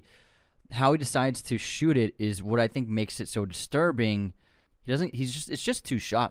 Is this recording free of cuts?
no; 1 cut; at 4.7 s

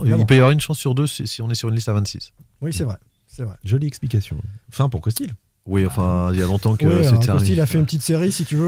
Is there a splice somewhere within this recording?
yes; 1 cut; at 4.6 s

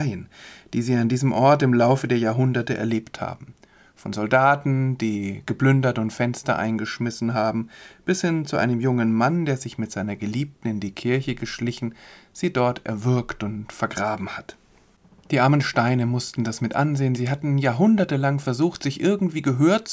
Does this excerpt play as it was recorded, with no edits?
yes; 0 cuts

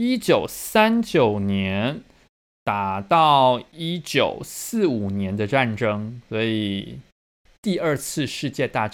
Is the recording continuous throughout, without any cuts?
yes; 0 cuts

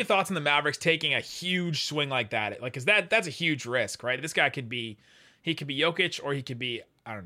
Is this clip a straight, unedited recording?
yes; 0 cuts

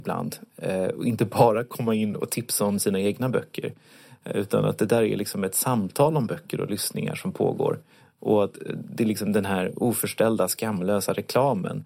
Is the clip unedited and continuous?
yes; 0 cuts

